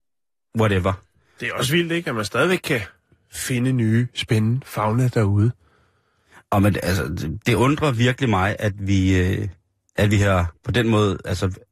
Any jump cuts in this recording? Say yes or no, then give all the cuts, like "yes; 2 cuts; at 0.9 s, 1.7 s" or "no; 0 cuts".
no; 0 cuts